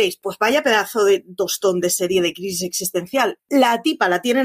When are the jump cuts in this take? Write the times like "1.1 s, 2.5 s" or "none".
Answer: 3.4 s